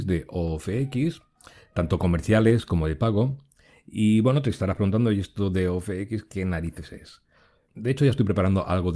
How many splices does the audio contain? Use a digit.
1